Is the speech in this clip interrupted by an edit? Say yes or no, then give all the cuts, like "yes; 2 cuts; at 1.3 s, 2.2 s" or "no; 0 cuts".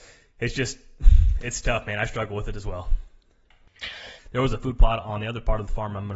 yes; 1 cut; at 4.2 s